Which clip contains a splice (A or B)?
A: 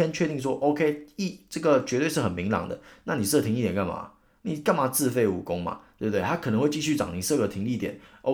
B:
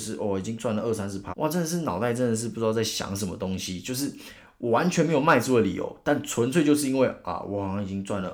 B